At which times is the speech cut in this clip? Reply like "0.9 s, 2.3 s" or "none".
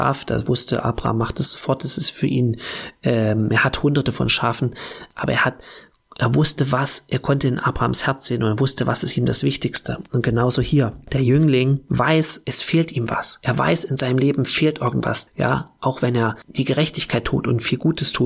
15.3 s

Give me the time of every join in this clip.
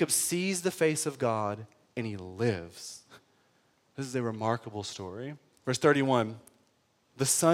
5.6 s

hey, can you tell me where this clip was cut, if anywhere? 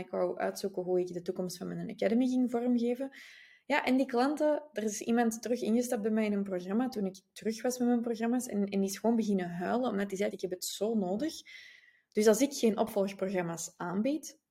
10.3 s

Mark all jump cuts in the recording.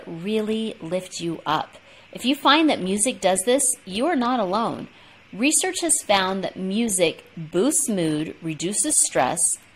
none

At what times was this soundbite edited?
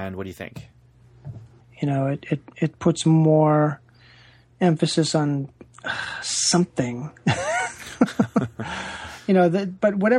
1.6 s

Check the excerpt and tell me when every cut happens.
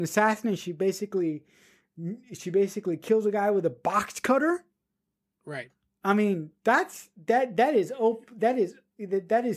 none

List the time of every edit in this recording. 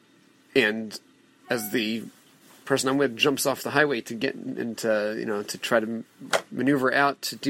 none

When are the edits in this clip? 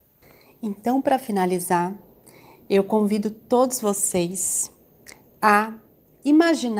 none

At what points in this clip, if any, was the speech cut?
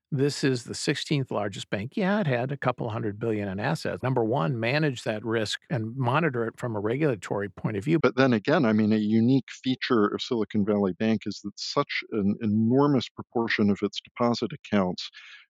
4.0 s, 8.0 s

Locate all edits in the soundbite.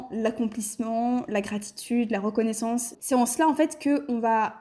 2.9 s

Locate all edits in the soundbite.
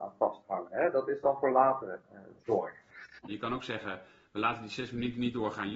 3.3 s

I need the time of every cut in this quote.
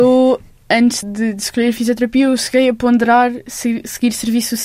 1.0 s

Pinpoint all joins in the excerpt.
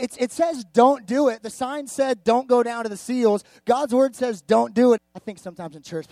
5.0 s

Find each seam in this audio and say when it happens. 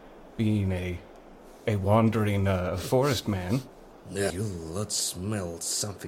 4.3 s

